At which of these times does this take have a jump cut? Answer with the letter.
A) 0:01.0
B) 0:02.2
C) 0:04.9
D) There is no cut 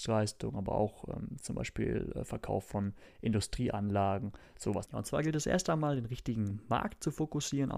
C